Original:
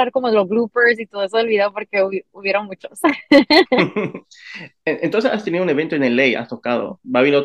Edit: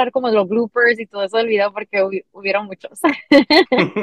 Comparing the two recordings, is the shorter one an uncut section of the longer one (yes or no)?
yes